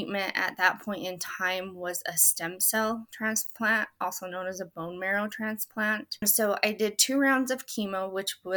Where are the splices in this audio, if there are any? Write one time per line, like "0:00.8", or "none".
none